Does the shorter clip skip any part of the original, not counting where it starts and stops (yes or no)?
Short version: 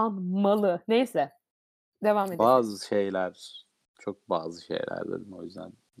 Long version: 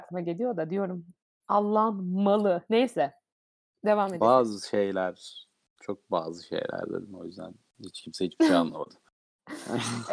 no